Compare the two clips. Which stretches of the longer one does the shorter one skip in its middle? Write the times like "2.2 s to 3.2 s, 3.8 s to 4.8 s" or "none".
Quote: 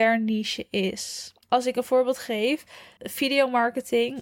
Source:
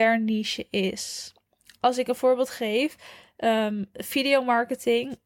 1.4 s to 1.7 s, 3.3 s to 3.9 s

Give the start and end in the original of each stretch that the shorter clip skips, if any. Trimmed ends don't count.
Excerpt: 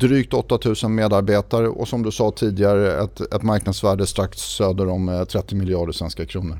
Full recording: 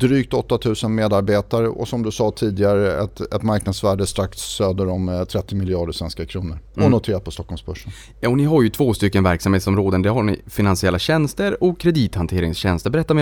none

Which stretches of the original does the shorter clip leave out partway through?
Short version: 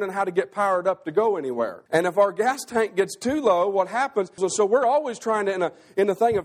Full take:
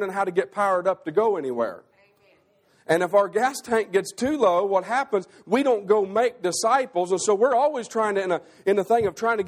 1.9 s to 2.8 s, 5.3 s to 7.1 s

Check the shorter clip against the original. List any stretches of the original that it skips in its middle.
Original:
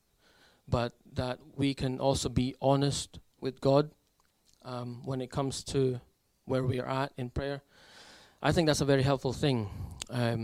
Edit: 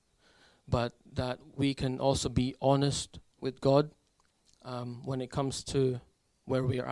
none

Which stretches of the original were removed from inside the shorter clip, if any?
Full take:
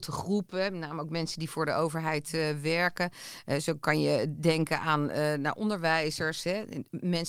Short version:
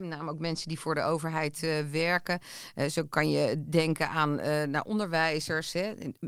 none

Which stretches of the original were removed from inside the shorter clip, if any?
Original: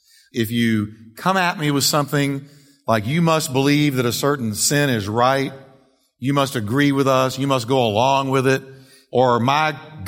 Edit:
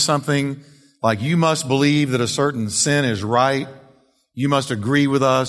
none

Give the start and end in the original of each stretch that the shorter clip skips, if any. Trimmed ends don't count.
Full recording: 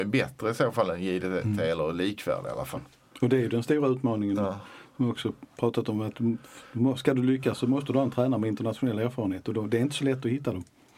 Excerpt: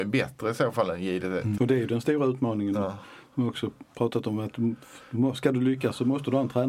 1.6 s to 3.2 s

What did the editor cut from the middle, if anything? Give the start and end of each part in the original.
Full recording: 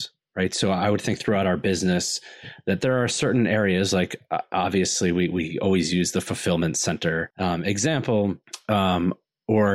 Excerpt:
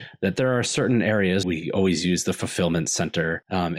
3.9 s to 5.3 s

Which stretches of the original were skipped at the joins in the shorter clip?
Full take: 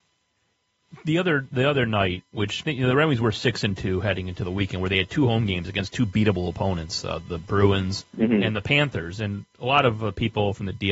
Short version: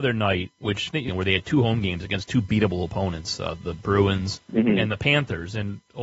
2.8 s to 4.7 s

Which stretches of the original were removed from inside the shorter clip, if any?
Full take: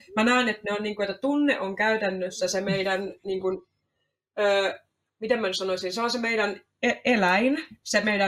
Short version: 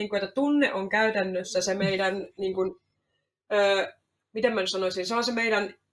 none

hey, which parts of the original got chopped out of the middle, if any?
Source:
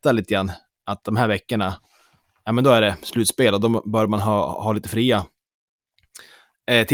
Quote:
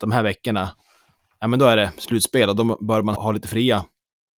4.2 s to 4.6 s

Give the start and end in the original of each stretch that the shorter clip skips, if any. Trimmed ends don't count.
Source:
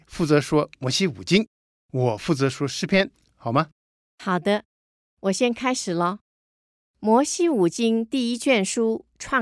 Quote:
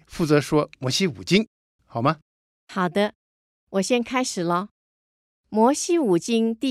1.8 s to 3.3 s

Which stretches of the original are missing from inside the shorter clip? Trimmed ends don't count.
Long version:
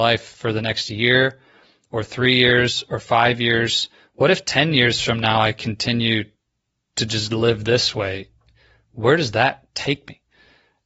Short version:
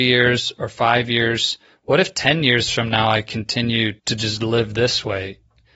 6.3 s to 6.9 s

